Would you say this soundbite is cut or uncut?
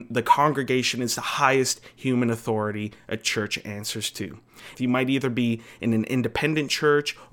cut